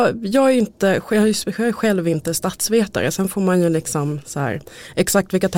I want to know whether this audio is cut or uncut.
uncut